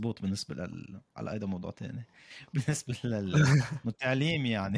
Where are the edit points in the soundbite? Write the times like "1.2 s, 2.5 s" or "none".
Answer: none